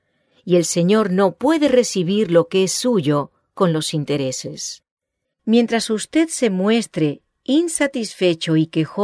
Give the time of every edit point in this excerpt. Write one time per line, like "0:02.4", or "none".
0:05.2